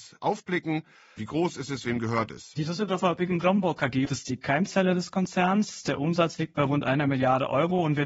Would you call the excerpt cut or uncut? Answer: cut